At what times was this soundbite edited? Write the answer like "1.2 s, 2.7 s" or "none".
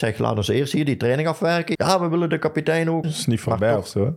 1.7 s, 3.0 s

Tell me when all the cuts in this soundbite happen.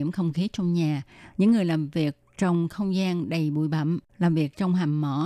1.3 s, 4.1 s

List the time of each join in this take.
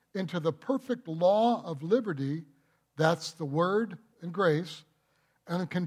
4.1 s

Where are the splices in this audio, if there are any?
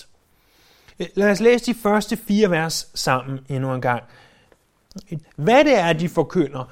5.2 s

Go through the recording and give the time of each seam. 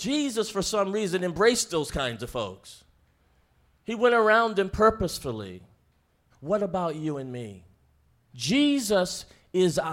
6.3 s, 8.3 s

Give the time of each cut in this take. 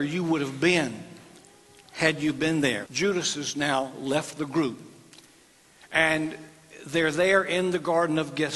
2.9 s

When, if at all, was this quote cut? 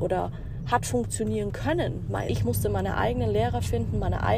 2.3 s

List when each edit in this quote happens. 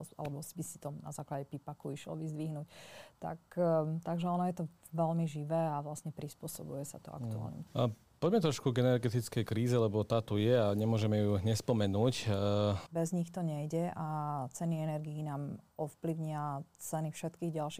7.7 s, 12.9 s

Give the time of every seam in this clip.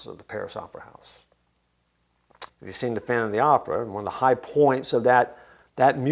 2.5 s

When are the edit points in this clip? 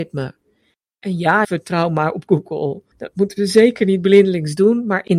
1.4 s

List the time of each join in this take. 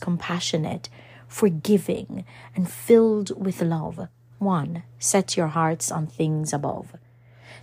4.3 s

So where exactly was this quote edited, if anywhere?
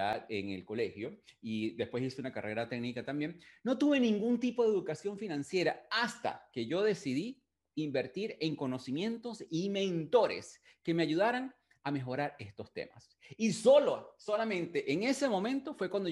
none

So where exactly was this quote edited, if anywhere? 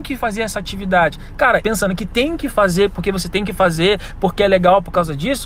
1.6 s

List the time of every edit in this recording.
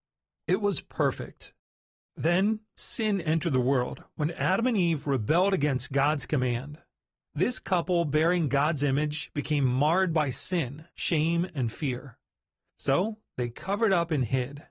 10.9 s

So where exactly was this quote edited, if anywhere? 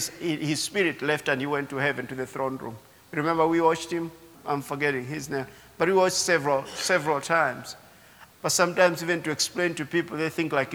4.3 s, 8.3 s

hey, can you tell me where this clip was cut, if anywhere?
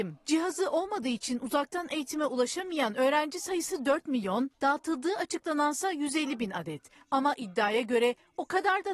4.5 s

